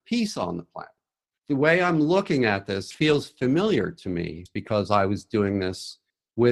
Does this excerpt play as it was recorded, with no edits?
yes; 0 cuts

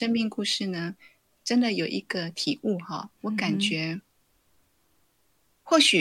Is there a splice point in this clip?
no; 0 cuts

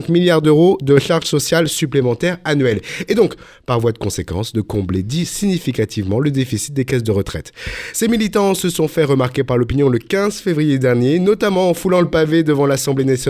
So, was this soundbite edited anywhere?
no; 0 cuts

